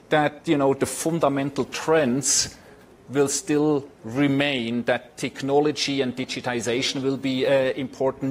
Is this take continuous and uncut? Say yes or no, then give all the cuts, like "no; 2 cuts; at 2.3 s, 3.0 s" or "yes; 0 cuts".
yes; 0 cuts